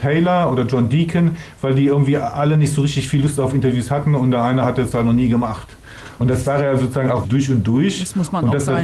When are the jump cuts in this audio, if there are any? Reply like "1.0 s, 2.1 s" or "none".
6.2 s, 7.2 s